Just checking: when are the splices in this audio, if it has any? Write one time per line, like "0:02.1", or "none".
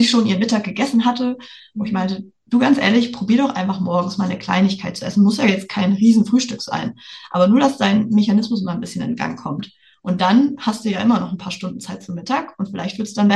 none